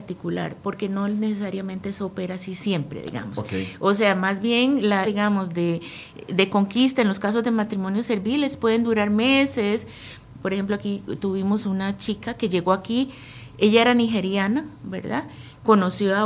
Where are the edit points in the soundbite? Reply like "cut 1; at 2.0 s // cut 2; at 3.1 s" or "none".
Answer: cut 1; at 5.1 s